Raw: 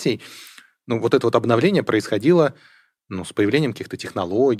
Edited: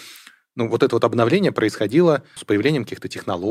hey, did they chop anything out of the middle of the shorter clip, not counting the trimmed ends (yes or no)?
yes